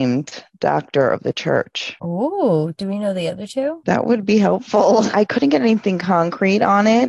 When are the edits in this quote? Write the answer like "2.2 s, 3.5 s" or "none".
5.1 s